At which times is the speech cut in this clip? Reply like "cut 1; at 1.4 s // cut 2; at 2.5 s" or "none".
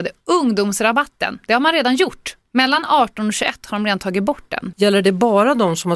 cut 1; at 2.5 s // cut 2; at 4.7 s